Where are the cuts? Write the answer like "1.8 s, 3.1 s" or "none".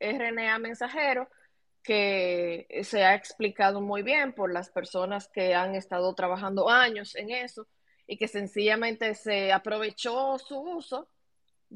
none